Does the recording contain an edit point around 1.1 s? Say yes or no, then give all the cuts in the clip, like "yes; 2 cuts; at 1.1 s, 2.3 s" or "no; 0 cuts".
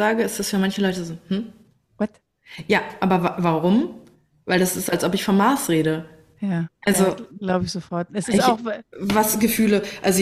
no; 0 cuts